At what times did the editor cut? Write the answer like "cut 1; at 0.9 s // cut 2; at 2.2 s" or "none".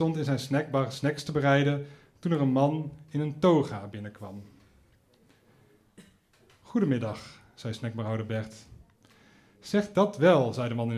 none